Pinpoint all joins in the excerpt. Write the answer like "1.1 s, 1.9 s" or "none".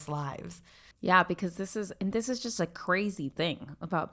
0.9 s